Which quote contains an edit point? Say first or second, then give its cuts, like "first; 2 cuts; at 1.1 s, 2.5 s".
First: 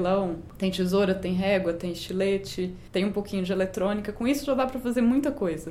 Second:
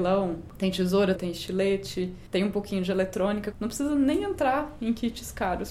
second; 2 cuts; at 1.2 s, 3.5 s